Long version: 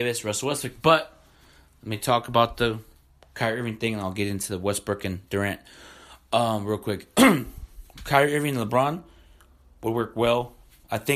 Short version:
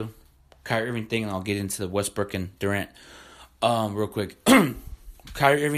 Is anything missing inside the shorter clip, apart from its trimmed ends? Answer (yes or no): no